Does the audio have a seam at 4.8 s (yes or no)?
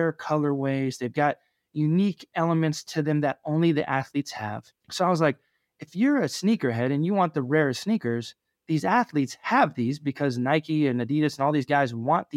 yes